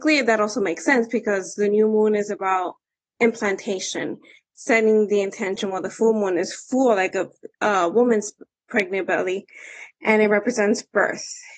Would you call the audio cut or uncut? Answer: uncut